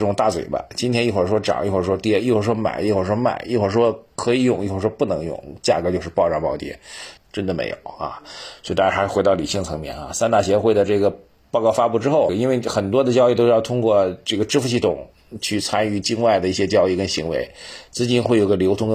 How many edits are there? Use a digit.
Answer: 2